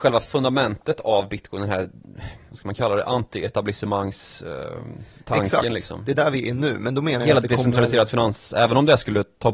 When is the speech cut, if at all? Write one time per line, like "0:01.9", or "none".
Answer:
0:08.5